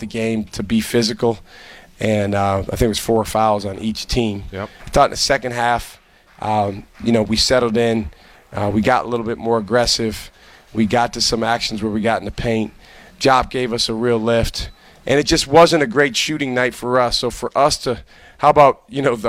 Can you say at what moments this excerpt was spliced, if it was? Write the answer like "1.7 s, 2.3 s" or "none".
4.8 s